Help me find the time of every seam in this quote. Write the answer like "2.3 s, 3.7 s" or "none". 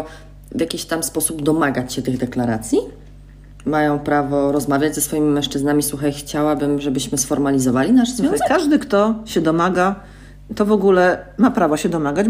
none